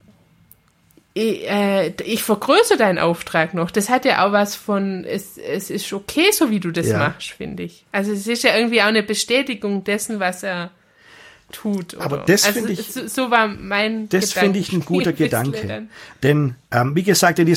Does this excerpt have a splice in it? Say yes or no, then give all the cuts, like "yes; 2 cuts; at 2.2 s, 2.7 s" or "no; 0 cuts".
no; 0 cuts